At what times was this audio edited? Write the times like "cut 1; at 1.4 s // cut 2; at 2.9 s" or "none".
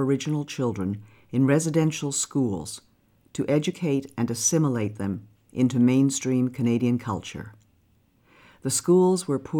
none